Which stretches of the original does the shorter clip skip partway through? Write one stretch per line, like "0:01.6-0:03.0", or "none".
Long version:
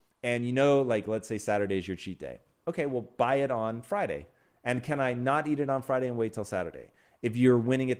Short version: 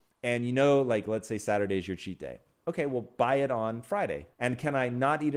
0:04.3-0:04.6